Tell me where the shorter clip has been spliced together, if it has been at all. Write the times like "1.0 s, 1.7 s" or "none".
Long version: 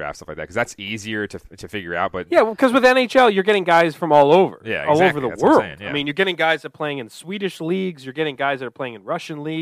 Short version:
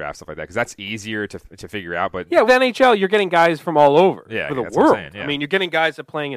2.5 s, 4.5 s